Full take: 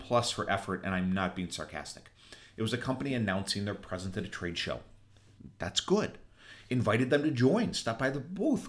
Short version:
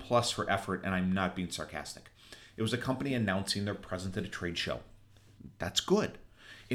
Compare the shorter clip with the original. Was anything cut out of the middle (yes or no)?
no